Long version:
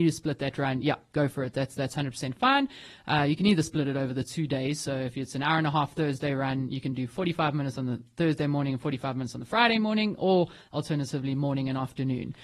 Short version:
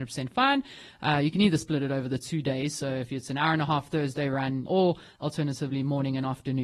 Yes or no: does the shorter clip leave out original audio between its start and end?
yes